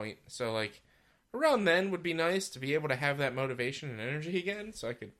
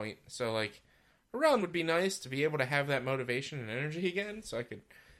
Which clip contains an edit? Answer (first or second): second